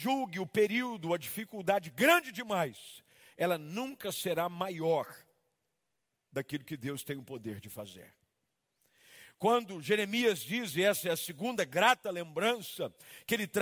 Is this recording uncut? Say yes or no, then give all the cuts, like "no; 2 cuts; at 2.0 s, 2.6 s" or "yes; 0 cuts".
yes; 0 cuts